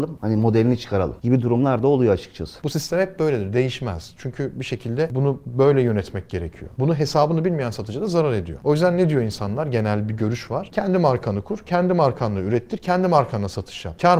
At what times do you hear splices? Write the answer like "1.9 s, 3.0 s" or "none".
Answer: 2.6 s